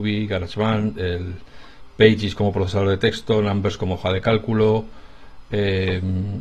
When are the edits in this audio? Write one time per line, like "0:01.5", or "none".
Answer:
none